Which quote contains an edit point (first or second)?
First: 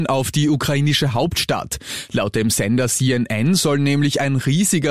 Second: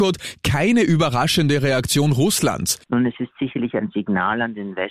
second